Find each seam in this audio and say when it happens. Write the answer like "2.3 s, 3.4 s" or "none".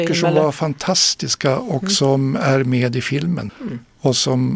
3.5 s